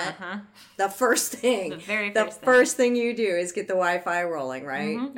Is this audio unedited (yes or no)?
yes